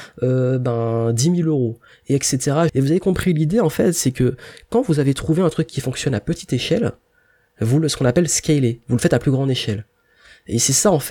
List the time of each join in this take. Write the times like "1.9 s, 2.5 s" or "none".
2.7 s